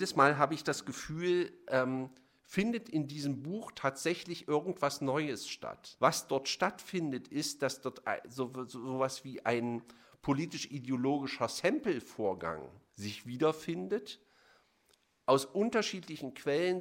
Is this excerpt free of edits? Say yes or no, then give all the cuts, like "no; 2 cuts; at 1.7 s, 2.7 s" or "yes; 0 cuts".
no; 2 cuts; at 6.0 s, 12.9 s